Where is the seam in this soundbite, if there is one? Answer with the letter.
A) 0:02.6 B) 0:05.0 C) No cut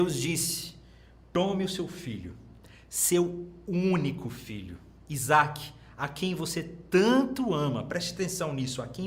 C